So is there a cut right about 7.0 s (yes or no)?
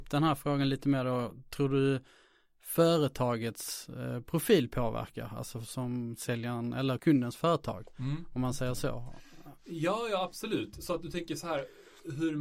yes